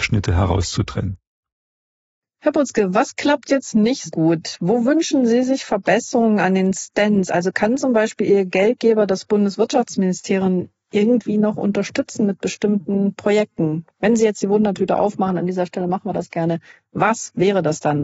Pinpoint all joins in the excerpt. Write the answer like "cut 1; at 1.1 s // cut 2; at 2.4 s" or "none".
cut 1; at 4.1 s